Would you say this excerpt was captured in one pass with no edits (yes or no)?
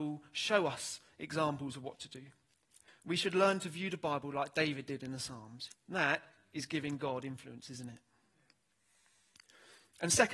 no